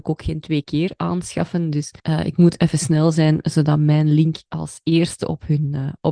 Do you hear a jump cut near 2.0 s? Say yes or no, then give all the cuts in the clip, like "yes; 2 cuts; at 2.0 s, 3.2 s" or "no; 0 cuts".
yes; 1 cut; at 2.0 s